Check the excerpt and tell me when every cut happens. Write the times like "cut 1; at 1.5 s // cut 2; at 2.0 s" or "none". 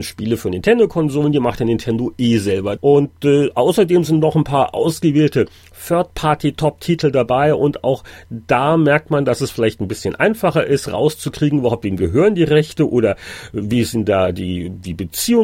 cut 1; at 2.8 s